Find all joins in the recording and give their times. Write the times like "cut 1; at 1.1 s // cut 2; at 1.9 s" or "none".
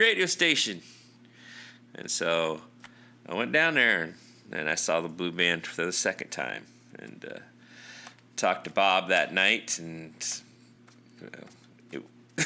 none